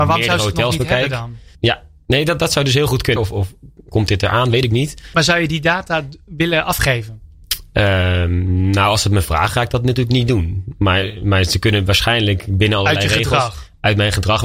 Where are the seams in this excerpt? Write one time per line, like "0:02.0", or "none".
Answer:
0:01.5
0:03.2
0:05.1